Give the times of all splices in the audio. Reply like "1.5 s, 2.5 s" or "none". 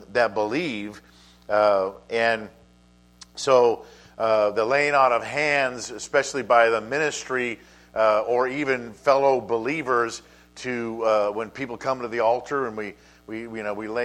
none